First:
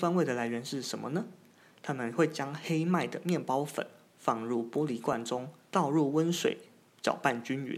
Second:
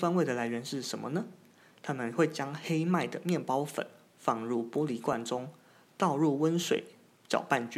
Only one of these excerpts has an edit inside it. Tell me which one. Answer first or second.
first